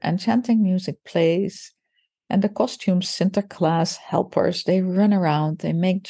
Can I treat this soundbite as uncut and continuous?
yes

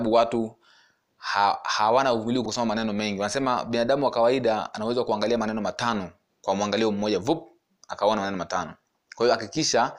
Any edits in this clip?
yes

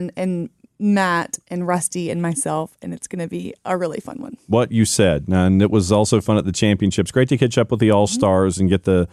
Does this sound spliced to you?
no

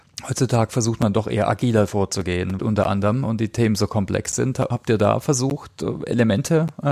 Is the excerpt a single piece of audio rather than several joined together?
no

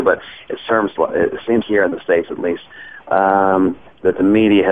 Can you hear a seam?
yes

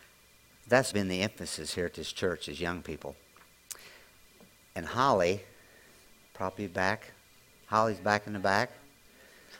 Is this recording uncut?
no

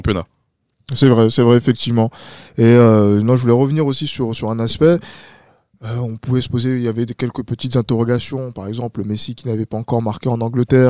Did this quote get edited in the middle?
yes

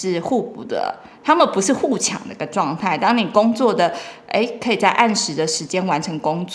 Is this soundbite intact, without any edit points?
yes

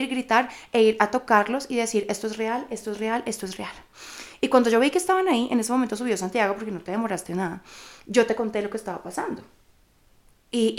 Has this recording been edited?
no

